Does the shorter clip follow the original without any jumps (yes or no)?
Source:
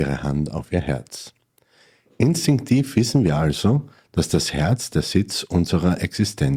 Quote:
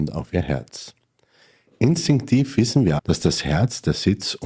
no